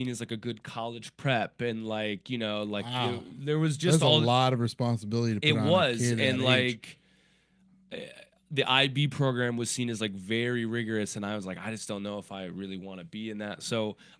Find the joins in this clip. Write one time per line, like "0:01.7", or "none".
none